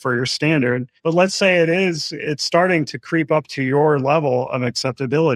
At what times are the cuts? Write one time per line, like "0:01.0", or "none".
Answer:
none